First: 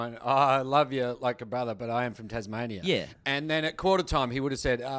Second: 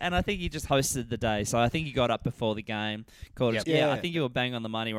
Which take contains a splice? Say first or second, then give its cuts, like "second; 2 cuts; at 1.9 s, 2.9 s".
second; 1 cut; at 3.6 s